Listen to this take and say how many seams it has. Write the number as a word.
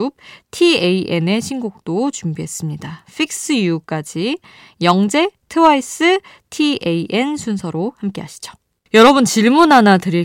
one